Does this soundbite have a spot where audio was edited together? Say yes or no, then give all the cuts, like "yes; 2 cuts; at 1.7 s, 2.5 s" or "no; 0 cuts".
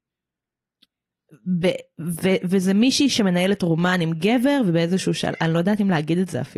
no; 0 cuts